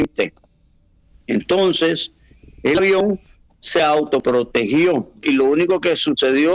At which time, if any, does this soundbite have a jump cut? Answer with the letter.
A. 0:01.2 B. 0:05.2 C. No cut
B